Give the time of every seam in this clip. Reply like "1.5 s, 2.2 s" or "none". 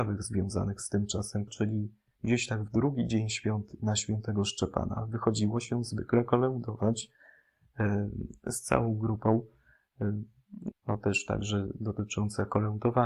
1.5 s, 10.7 s